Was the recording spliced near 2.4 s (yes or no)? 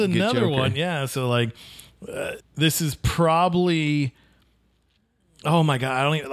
yes